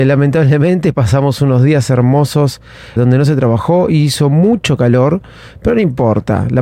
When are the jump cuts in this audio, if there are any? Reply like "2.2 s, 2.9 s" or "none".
3.0 s